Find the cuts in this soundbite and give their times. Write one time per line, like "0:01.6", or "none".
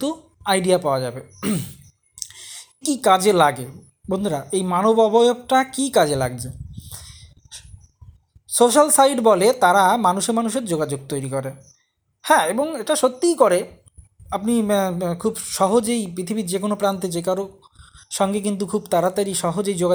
0:02.8